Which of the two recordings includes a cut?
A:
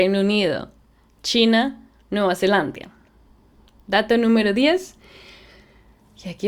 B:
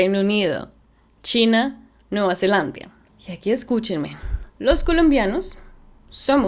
B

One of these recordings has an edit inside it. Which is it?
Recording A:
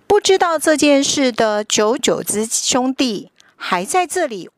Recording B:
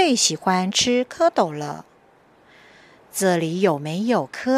A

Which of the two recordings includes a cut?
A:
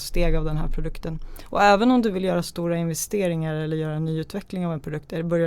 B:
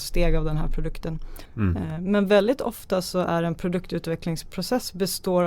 B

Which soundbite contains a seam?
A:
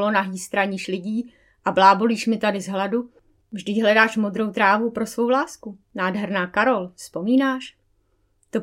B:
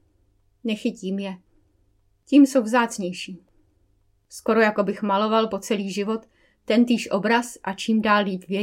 A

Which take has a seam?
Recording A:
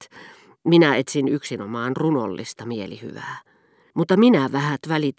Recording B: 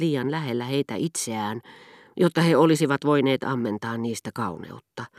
A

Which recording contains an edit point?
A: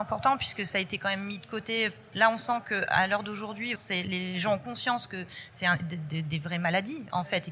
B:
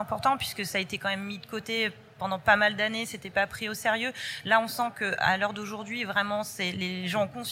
A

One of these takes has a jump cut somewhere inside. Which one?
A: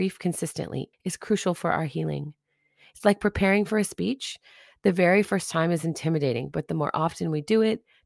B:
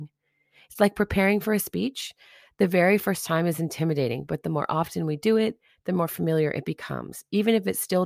A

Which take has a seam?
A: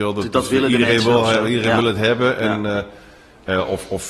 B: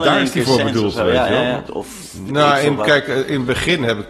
B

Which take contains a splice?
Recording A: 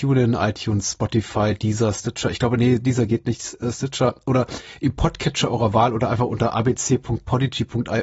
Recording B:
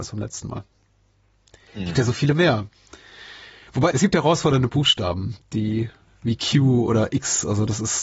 B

